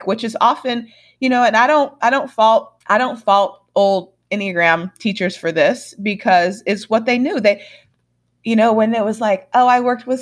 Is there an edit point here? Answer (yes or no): yes